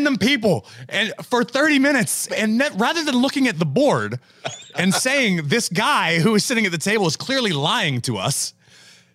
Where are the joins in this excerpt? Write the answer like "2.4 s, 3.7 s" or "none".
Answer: 2.3 s